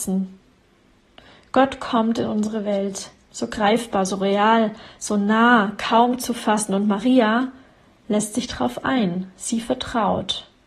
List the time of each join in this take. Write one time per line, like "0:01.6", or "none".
none